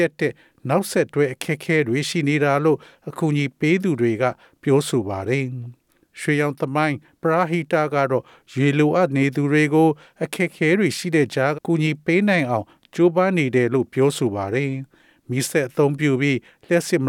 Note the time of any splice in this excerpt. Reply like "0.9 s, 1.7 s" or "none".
11.5 s